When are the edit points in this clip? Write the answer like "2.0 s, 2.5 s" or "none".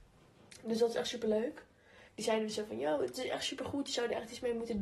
2.1 s